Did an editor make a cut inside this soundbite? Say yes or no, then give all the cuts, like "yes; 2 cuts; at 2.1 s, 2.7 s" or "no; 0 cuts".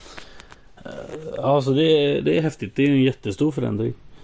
no; 0 cuts